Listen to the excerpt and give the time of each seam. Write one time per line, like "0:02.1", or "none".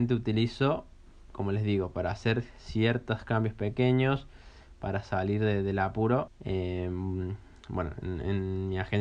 0:06.3